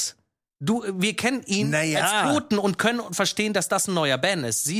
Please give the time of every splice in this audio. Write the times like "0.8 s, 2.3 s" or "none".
none